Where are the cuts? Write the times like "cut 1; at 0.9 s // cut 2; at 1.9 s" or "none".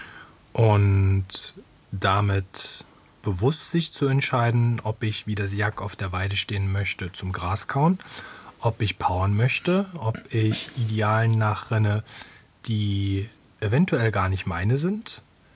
none

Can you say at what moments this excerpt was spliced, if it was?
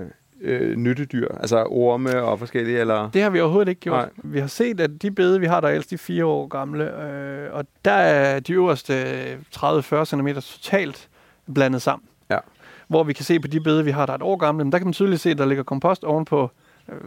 none

